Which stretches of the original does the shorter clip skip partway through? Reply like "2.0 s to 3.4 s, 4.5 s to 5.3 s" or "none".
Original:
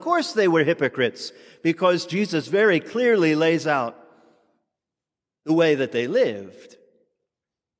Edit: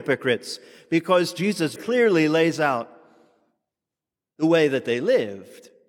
2.5 s to 2.8 s